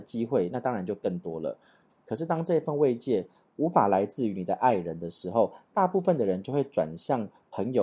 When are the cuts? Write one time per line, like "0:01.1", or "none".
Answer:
0:01.9